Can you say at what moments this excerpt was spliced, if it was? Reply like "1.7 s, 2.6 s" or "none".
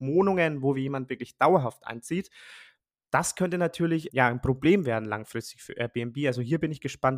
4.1 s